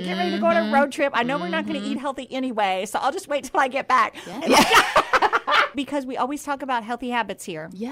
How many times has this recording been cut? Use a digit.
2